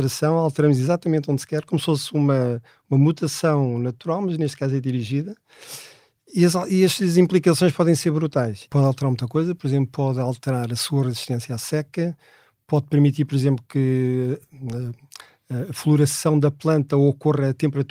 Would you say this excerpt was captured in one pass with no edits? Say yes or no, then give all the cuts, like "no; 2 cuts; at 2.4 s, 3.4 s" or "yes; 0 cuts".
no; 1 cut; at 8.7 s